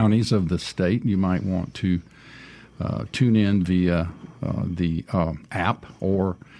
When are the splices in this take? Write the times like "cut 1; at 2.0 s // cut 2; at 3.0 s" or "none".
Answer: none

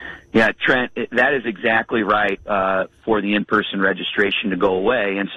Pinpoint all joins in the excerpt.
cut 1; at 2.4 s

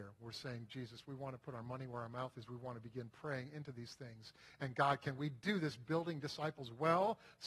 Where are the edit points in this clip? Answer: none

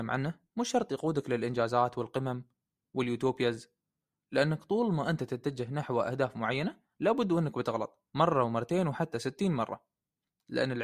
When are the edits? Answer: cut 1; at 8.1 s

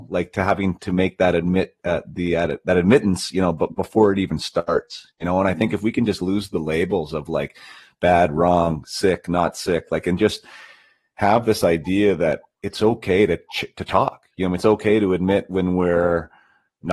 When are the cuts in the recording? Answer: none

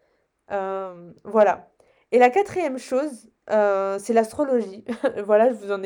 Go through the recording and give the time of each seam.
none

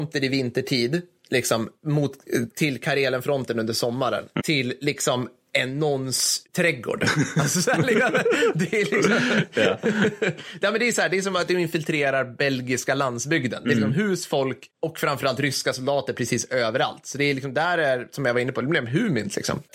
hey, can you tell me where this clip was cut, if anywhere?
cut 1; at 4.4 s

